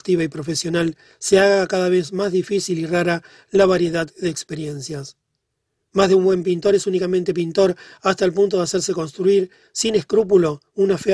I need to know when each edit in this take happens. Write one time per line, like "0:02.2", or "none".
none

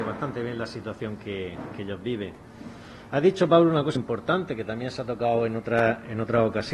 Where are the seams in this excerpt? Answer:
0:04.0

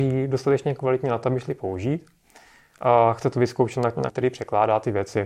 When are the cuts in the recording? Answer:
0:02.6
0:04.1

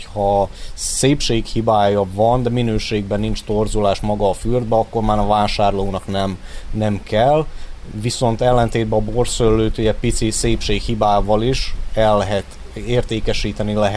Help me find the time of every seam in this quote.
none

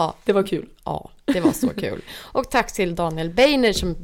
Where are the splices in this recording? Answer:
none

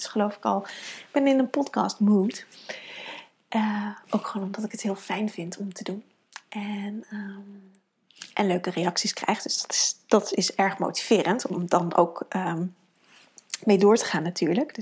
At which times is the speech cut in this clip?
none

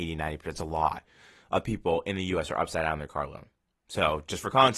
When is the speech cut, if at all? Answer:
none

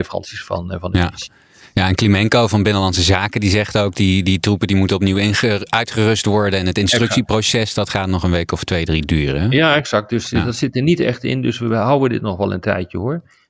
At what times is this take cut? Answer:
none

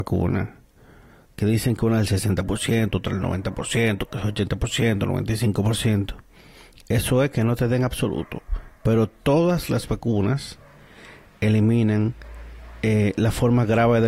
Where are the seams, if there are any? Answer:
none

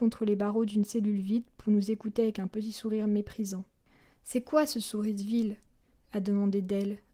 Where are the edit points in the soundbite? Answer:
none

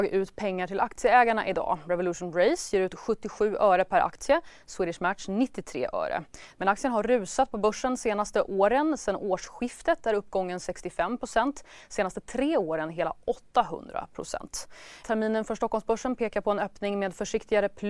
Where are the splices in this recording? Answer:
0:06.5
0:15.0

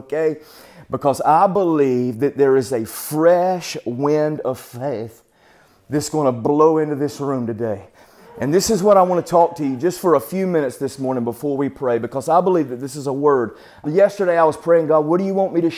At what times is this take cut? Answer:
0:08.3
0:13.8

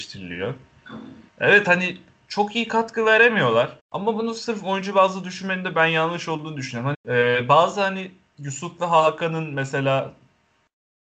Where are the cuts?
0:01.3
0:03.8
0:06.9

